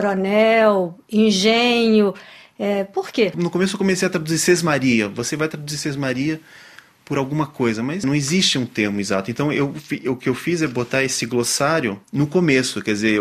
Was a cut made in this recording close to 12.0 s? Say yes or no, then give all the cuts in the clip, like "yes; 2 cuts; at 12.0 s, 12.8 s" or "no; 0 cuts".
yes; 1 cut; at 12.0 s